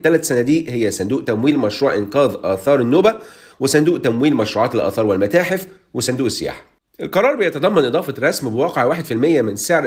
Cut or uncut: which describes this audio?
uncut